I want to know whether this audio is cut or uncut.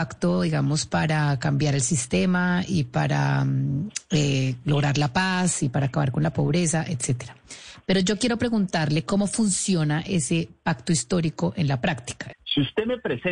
cut